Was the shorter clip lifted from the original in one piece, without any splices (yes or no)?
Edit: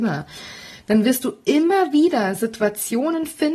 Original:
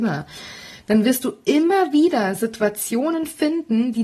yes